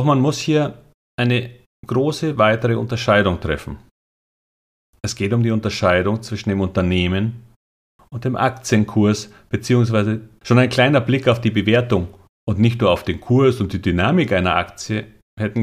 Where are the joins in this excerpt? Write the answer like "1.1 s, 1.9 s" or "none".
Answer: 8.0 s, 10.4 s